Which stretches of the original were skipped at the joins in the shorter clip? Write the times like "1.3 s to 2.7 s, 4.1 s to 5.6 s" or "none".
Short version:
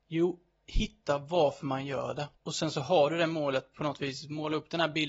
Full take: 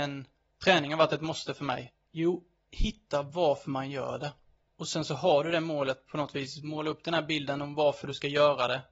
4.4 s to 4.7 s